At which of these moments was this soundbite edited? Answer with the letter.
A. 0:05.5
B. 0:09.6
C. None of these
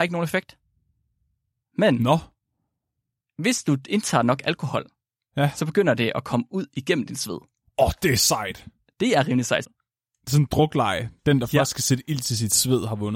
B